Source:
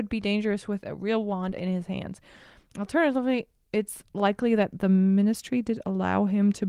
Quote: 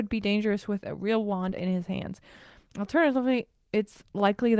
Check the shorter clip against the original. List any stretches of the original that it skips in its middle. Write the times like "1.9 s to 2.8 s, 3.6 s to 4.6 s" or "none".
none

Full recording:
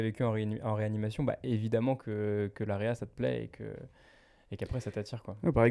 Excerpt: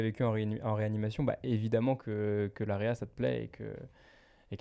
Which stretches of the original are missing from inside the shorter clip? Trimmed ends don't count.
none

